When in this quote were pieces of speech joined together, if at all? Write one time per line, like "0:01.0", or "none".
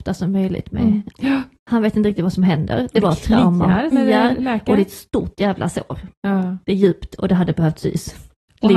0:01.1
0:03.9